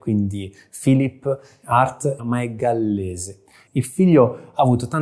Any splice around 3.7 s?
yes; 2 cuts; at 2.2 s, 3.7 s

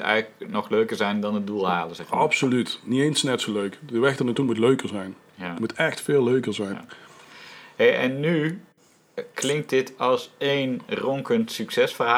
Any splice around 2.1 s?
no; 0 cuts

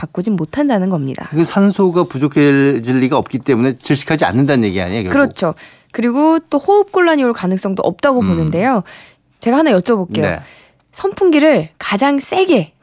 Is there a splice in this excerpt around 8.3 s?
no; 0 cuts

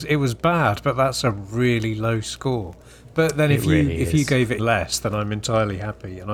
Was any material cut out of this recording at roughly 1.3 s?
no; 1 cut; at 4.6 s

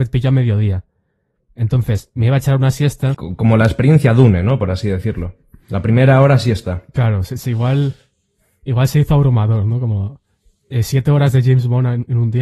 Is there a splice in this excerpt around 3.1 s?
yes; 1 cut; at 3.1 s

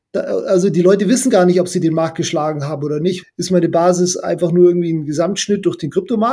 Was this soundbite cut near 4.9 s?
no; 1 cut; at 3.2 s

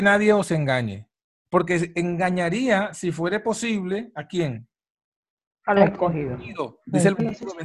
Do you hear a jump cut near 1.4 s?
yes; 1 cut; at 1.4 s

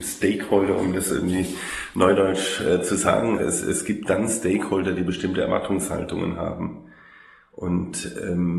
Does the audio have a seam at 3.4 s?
yes; 1 cut; at 3.4 s

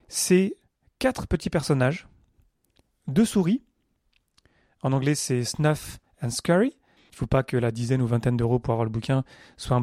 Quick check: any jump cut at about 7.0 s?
yes; 1 cut; at 7.0 s

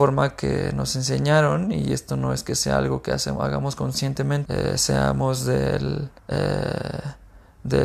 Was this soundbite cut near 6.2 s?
yes; 2 cuts; at 4.4 s, 6.2 s

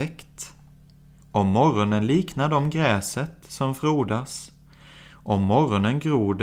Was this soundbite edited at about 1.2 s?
yes; 1 cut; at 1.2 s

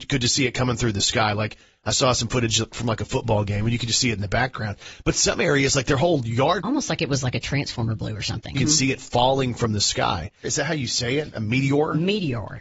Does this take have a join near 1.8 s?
no; 3 cuts; at 6.6 s, 8.5 s, 10.4 s

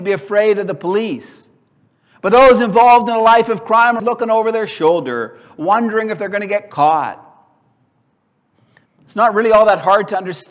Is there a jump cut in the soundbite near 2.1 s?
no; 2 cuts; at 4.0 s, 8.9 s

